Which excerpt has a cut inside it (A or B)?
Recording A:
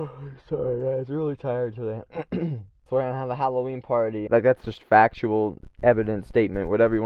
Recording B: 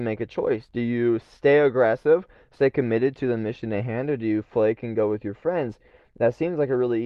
A